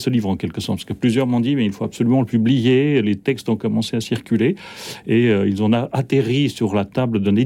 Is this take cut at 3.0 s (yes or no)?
no